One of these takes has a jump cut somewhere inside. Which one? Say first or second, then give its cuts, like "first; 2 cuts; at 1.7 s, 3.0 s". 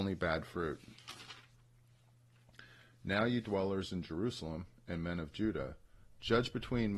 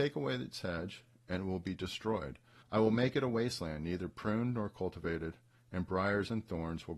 second; 1 cut; at 2.6 s